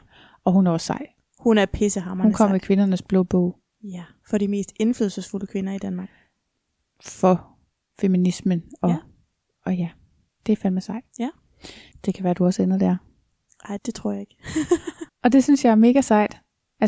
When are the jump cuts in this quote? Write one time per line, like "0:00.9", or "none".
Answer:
0:13.8
0:15.1